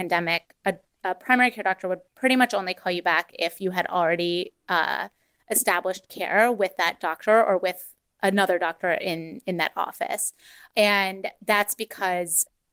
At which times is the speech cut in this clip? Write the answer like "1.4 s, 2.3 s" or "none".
none